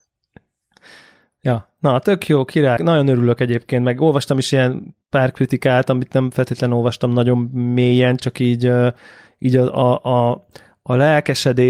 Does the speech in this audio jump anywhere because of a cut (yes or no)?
yes